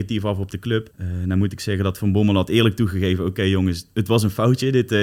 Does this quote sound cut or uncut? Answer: cut